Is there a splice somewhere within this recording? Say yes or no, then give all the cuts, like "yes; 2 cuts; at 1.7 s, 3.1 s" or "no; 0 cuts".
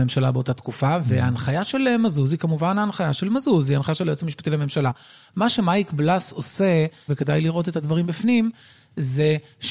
yes; 1 cut; at 7.1 s